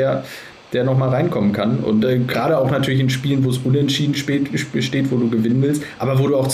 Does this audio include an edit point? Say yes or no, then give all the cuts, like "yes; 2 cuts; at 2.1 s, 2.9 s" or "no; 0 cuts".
no; 0 cuts